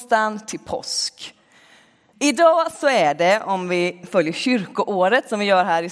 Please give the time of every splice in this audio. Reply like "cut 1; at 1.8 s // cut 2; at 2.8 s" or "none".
cut 1; at 2.1 s